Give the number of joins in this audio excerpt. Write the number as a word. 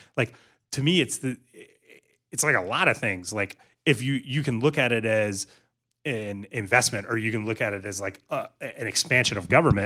zero